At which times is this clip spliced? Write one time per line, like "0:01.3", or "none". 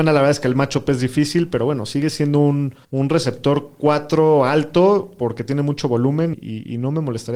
0:02.8
0:06.3